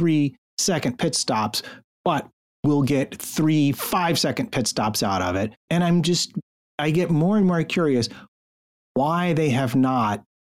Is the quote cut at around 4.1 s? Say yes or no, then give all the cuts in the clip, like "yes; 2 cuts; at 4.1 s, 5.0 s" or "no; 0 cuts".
no; 1 cut; at 5.7 s